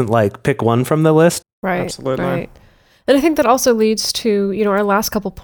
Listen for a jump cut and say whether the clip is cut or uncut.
cut